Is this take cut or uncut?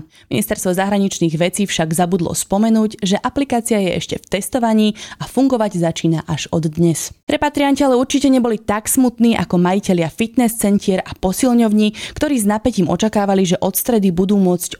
cut